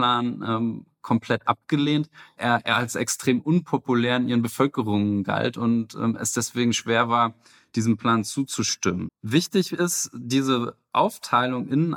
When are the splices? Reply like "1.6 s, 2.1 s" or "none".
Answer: 2.4 s, 9.1 s